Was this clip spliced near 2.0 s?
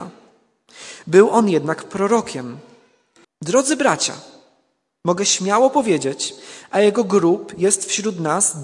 no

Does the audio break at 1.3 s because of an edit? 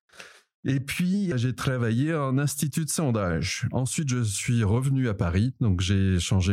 yes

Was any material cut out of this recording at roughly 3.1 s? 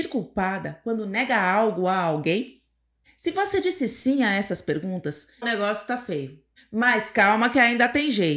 no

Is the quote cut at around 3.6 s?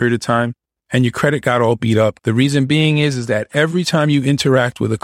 no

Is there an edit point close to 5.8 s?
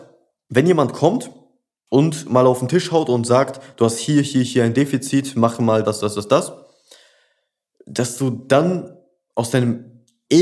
yes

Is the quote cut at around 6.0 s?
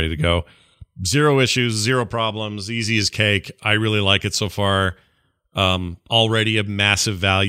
no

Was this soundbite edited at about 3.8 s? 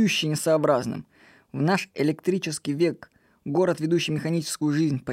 no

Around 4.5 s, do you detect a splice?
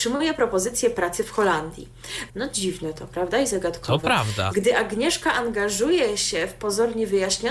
yes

